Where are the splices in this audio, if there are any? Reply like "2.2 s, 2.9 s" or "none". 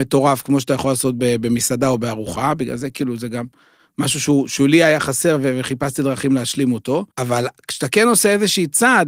7.1 s